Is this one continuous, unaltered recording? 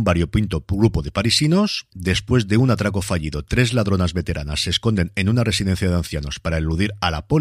no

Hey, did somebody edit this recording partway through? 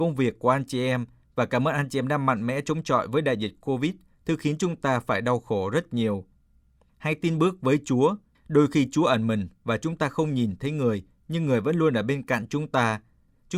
no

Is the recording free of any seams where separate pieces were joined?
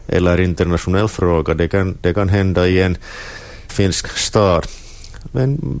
no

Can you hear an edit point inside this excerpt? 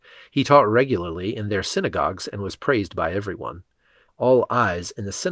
yes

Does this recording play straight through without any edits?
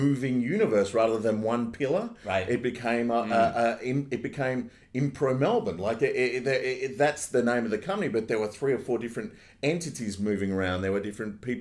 yes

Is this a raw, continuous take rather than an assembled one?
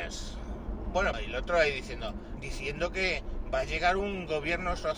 no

